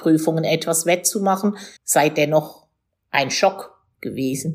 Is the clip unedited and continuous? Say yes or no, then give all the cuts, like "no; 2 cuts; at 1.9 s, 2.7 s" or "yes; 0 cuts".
no; 1 cut; at 1.8 s